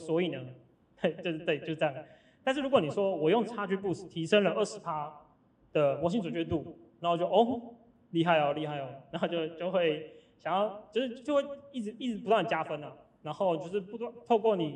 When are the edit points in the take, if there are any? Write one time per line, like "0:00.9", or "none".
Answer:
none